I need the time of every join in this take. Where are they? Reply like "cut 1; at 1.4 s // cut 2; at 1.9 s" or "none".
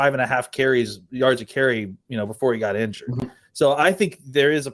none

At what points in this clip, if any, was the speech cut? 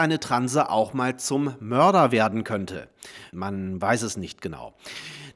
cut 1; at 3.3 s

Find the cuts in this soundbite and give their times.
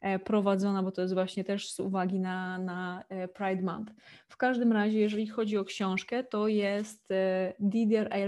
none

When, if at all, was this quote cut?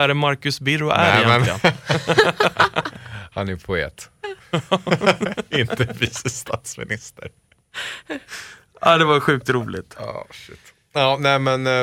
none

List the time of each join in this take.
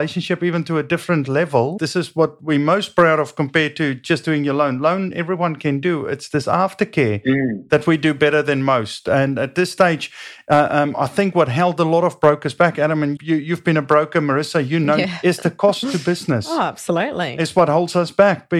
cut 1; at 1.8 s // cut 2; at 13.2 s

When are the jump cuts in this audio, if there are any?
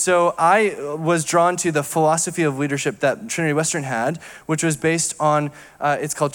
cut 1; at 3.3 s

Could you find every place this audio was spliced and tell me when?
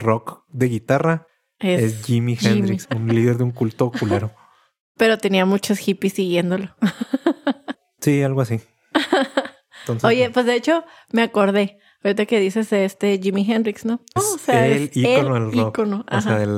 cut 1; at 2.8 s // cut 2; at 14.2 s

